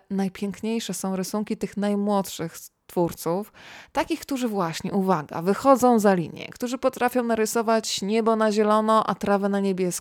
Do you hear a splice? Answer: no; 0 cuts

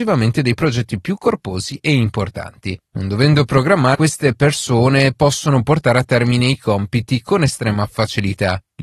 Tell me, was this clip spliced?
yes; 2 cuts; at 2.8 s, 3.9 s

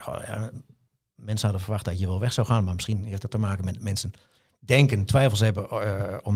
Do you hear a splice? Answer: no; 0 cuts

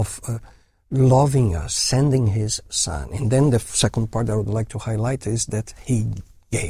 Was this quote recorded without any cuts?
yes; 0 cuts

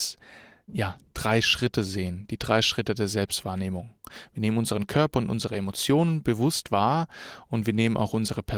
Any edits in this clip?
no; 0 cuts

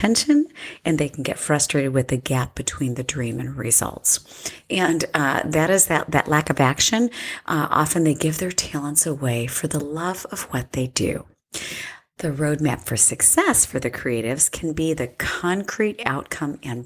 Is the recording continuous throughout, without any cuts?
yes; 0 cuts

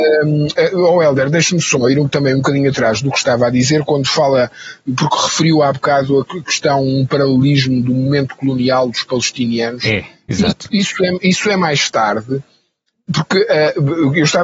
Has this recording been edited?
no; 0 cuts

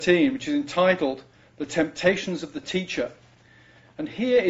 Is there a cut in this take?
no; 0 cuts

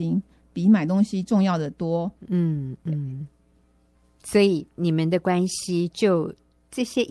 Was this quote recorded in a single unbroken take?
no; 1 cut; at 2.2 s

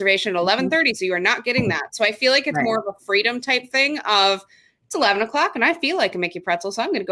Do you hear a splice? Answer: no; 0 cuts

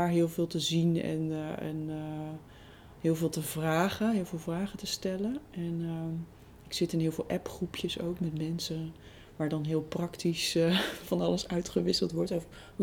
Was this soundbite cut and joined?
no; 0 cuts

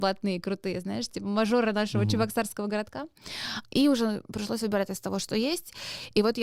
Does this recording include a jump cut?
yes; 1 cut; at 3.6 s

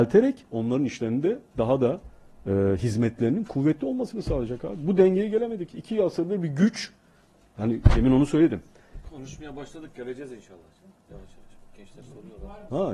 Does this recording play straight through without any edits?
yes; 0 cuts

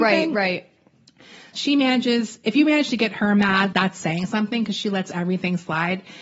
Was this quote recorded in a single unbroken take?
no; 2 cuts; at 1.5 s, 3.7 s

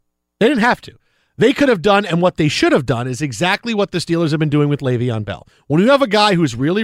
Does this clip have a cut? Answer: no; 0 cuts

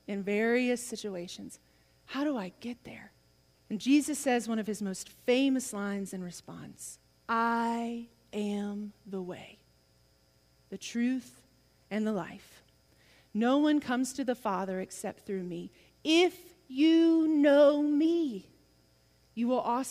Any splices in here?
yes; 1 cut; at 3.5 s

